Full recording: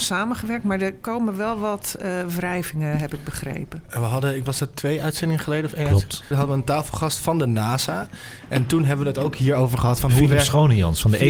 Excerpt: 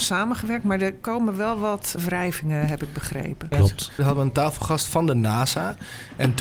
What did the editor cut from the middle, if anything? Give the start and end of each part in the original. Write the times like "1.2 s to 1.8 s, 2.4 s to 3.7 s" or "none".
2.0 s to 2.3 s, 3.8 s to 5.8 s